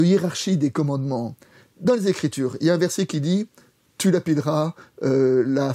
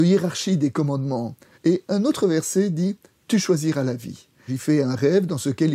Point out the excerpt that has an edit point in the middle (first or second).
second